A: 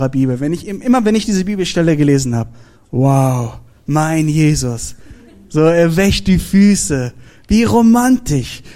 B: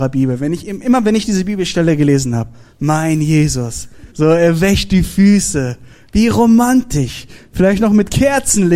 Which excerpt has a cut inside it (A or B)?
B